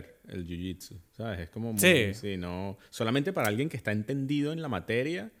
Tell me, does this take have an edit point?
no; 0 cuts

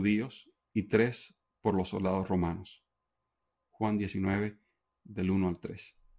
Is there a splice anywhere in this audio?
yes; 1 cut; at 3.6 s

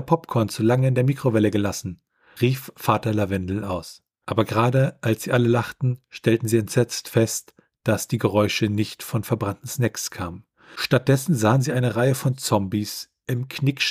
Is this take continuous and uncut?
yes; 0 cuts

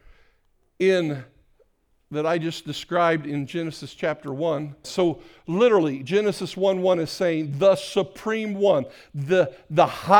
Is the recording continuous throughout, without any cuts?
no; 1 cut; at 4.8 s

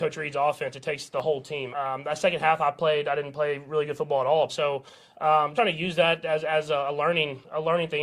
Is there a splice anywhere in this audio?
yes; 3 cuts; at 1.7 s, 4.5 s, 5.6 s

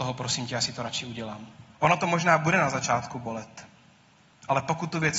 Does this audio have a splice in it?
yes; 1 cut; at 1.8 s

